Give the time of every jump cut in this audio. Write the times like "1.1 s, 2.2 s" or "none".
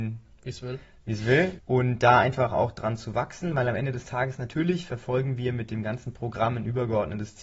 1.6 s